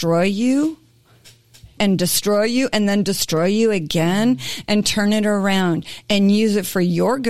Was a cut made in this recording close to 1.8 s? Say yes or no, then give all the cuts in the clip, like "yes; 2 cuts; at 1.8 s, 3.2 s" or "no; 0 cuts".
yes; 1 cut; at 1.8 s